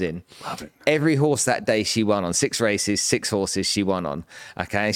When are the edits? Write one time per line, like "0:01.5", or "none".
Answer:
none